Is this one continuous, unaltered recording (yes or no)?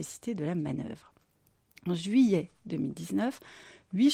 yes